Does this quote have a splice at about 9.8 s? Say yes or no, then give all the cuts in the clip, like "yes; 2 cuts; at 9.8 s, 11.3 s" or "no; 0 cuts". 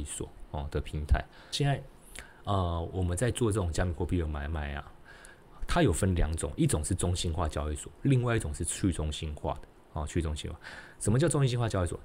no; 1 cut; at 1.5 s